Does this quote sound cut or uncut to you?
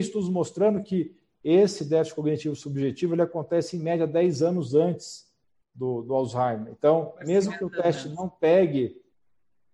uncut